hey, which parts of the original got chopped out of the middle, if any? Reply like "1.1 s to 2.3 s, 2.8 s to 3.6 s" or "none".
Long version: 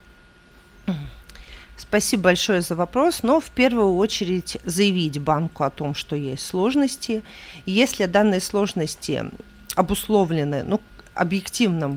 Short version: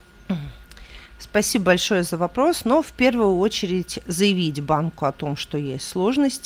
none